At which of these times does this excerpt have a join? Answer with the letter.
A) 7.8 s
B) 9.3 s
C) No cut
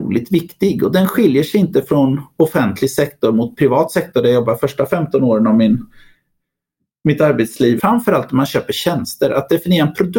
A